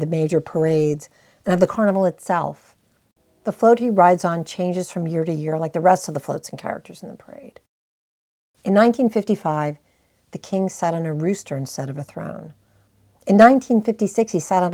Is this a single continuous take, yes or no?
yes